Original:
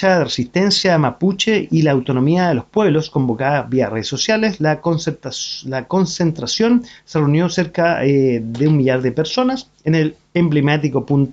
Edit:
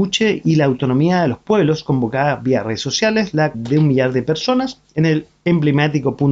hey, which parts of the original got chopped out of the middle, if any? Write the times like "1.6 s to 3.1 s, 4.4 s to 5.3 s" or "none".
4.8 s to 8.4 s